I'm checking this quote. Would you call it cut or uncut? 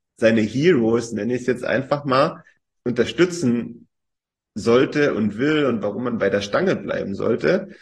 uncut